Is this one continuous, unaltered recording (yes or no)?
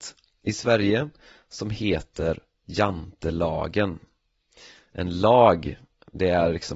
yes